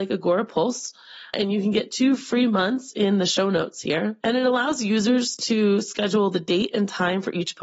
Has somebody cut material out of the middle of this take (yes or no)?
no